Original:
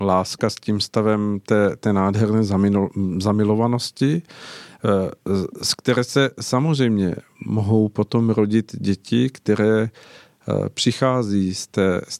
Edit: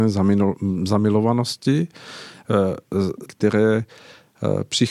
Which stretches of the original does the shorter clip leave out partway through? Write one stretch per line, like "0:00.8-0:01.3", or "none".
0:05.6-0:09.3